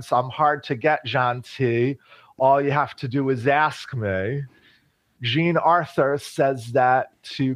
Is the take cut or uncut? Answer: cut